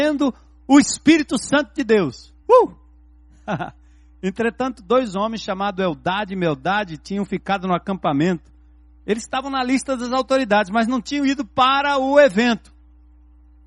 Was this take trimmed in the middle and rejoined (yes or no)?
no